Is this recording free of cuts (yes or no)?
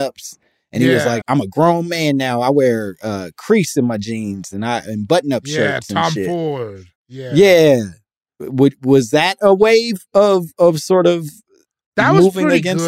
no